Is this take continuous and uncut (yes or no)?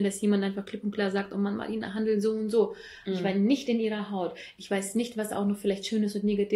no